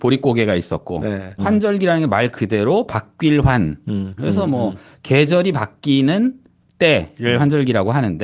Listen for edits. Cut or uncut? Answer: cut